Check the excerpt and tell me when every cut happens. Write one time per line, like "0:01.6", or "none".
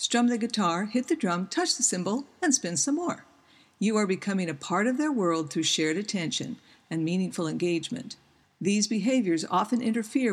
0:08.4

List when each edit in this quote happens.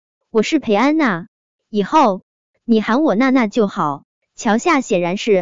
0:04.2

